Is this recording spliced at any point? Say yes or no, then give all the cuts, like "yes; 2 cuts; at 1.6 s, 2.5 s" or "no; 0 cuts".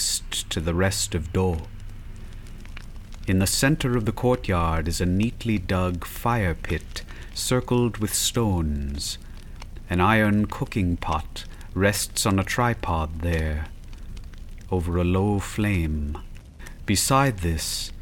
no; 0 cuts